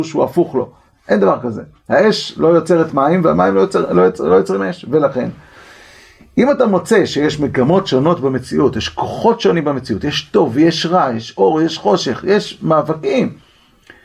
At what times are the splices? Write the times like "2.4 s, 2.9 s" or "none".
none